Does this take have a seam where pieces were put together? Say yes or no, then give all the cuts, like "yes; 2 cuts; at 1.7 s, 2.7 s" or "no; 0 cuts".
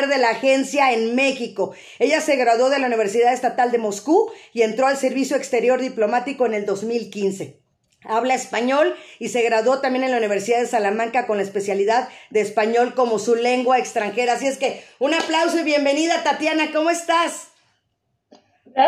no; 0 cuts